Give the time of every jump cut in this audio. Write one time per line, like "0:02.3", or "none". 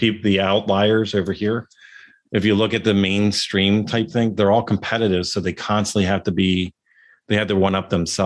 none

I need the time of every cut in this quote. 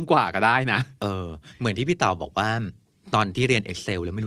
none

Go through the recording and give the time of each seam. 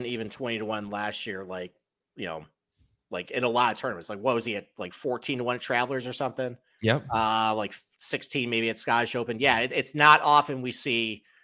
none

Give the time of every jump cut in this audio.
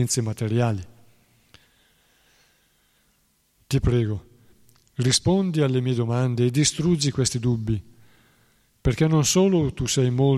none

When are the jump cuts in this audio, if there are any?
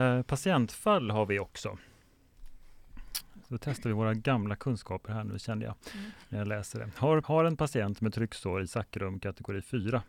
0:07.2

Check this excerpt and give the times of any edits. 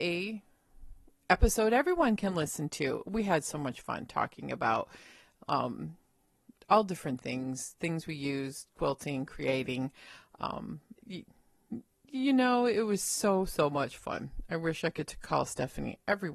0:11.0

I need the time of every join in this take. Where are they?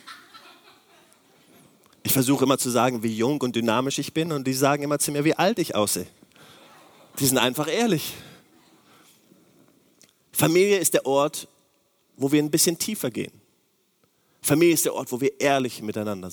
none

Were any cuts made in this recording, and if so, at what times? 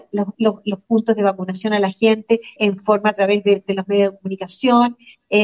0:02.6

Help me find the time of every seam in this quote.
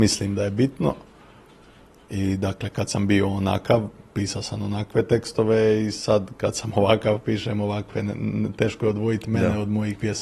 none

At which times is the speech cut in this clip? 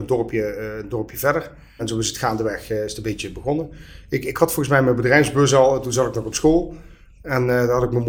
0:01.8

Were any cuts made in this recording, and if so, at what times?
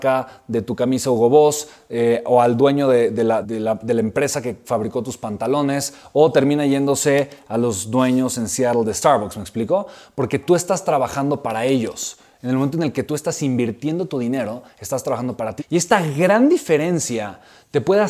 0:03.4
0:15.6

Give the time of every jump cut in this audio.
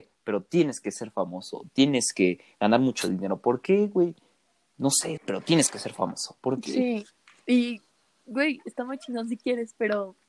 0:05.2

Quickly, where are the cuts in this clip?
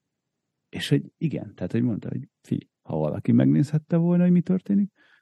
0:02.8

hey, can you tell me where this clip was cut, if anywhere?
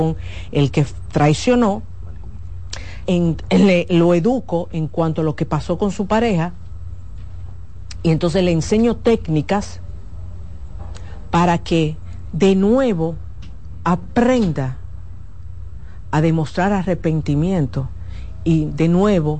0:03.1

